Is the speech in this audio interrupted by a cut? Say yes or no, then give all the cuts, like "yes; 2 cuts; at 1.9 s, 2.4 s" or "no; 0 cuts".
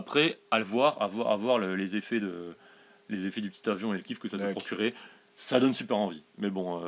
no; 0 cuts